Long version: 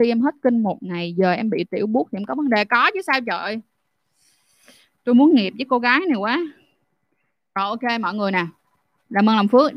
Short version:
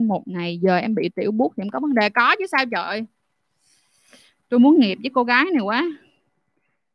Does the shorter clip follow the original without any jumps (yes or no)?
yes